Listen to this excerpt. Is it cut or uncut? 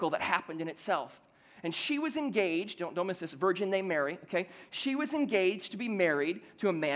uncut